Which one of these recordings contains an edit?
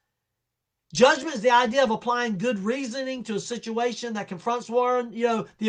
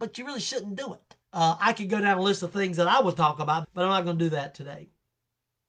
second; 2 cuts; at 1.2 s, 3.6 s

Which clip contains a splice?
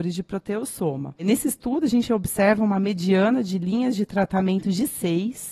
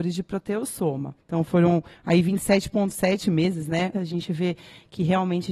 second; 2 cuts; at 1.2 s, 3.9 s

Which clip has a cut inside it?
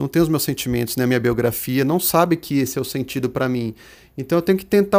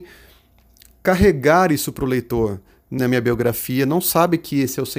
second; 1 cut; at 3.0 s

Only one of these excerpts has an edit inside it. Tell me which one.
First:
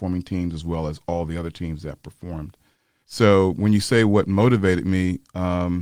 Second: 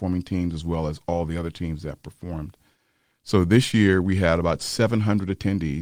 first; 1 cut; at 3.0 s

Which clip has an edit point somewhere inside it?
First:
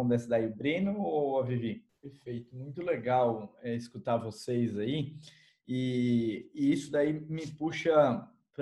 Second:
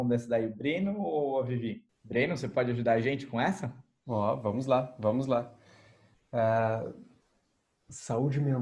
first; 1 cut; at 2.0 s

